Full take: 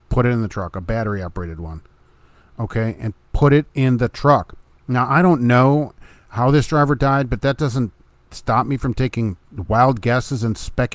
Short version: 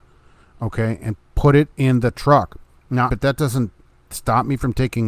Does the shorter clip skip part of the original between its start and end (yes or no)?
yes